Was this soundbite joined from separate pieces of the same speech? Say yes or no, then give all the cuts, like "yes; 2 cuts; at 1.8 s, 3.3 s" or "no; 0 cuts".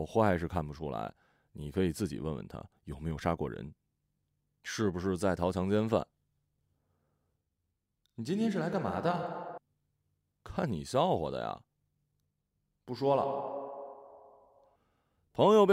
no; 0 cuts